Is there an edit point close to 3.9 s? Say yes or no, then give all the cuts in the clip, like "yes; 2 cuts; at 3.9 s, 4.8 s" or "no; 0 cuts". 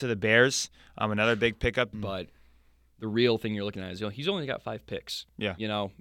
no; 1 cut; at 1.9 s